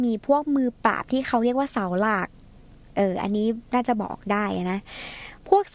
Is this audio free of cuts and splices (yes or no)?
yes